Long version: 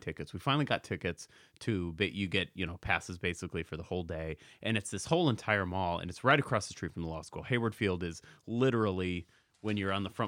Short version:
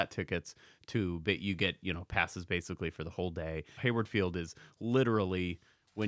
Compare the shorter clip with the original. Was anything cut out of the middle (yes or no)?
yes